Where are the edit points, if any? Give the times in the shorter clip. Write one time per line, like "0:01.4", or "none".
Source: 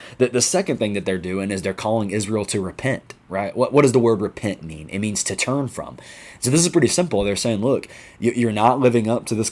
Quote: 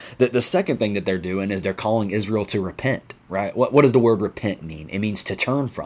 none